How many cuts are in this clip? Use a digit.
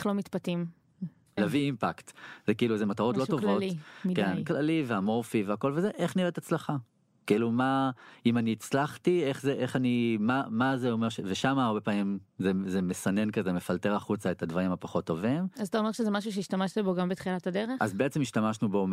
1